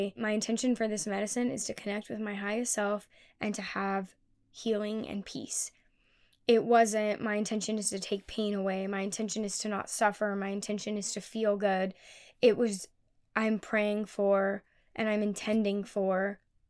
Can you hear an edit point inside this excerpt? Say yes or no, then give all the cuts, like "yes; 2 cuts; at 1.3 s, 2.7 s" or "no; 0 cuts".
no; 0 cuts